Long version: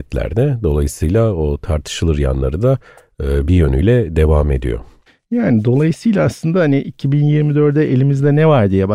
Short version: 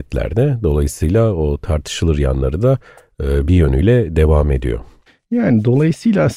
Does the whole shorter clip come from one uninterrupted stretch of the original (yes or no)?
yes